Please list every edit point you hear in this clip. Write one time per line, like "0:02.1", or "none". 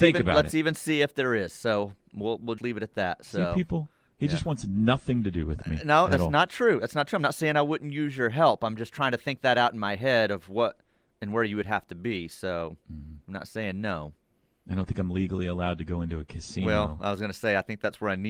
0:02.6